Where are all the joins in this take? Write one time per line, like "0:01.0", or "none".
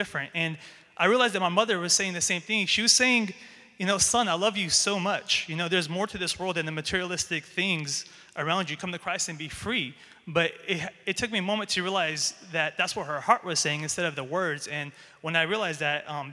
none